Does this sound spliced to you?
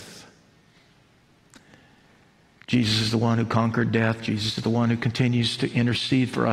no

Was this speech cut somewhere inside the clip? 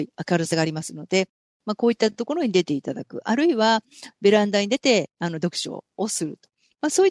yes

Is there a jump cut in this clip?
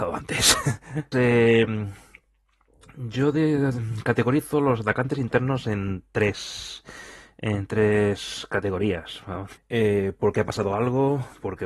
yes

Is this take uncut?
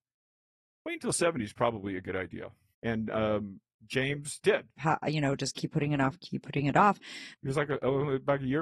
no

